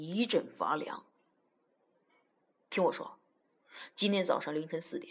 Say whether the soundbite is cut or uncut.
cut